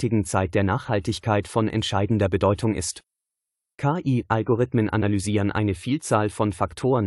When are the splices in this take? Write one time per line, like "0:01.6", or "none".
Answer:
0:03.7